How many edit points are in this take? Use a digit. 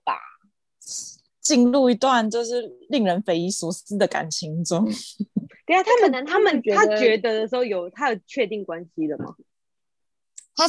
1